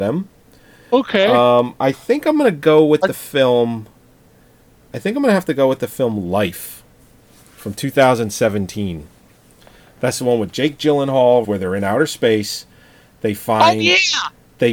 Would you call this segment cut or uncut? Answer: cut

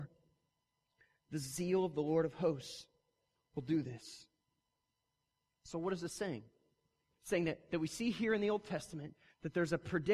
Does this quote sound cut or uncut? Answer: uncut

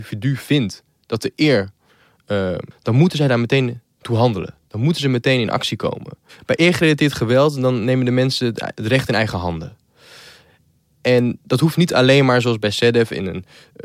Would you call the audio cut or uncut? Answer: cut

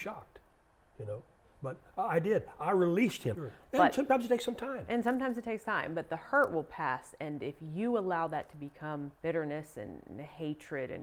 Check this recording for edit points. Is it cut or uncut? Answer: cut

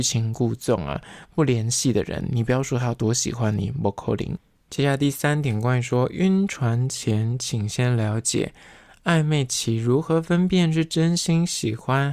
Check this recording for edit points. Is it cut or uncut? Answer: uncut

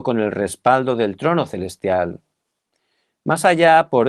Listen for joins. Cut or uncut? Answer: uncut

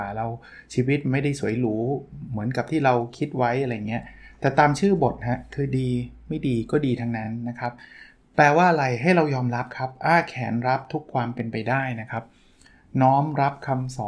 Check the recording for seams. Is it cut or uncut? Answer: uncut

